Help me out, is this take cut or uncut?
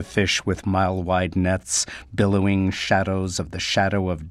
uncut